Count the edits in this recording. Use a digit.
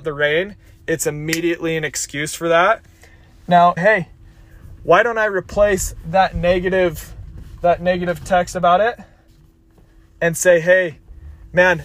1